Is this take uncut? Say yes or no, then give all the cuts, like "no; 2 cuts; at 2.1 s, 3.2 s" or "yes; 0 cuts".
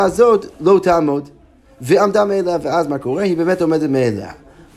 yes; 0 cuts